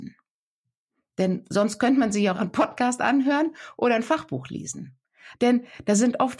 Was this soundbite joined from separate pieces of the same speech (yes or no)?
yes